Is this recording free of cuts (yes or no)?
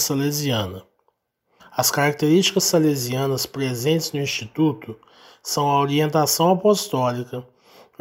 no